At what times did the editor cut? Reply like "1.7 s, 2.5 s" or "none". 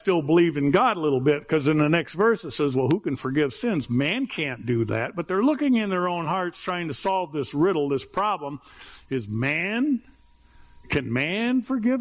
10.8 s